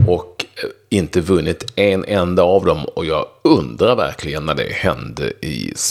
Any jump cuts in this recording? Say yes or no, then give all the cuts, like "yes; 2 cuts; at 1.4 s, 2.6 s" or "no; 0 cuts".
no; 0 cuts